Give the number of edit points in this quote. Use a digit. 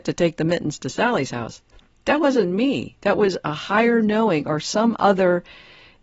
0